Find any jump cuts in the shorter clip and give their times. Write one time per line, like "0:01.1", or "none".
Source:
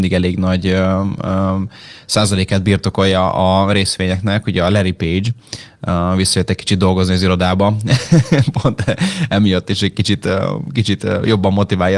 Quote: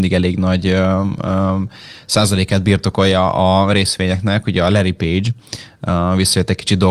none